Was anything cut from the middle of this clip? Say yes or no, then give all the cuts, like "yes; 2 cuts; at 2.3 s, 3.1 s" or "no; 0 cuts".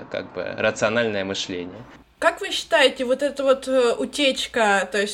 no; 0 cuts